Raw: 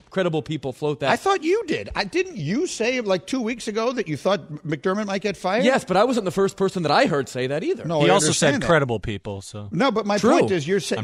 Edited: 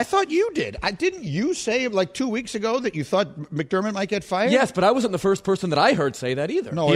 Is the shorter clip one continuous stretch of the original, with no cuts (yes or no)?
yes